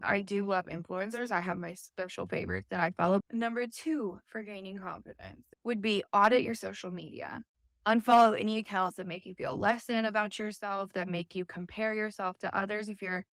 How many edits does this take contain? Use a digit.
1